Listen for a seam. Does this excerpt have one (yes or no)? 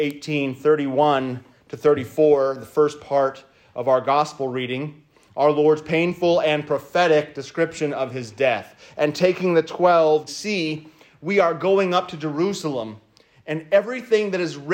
yes